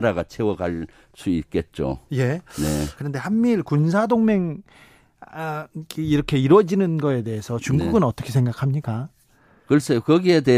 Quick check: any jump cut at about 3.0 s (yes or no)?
yes